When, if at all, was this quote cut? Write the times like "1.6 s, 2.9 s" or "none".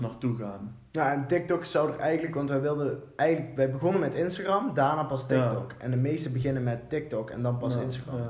none